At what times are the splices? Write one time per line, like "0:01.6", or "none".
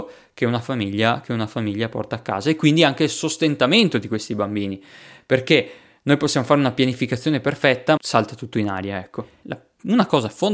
0:08.0
0:09.4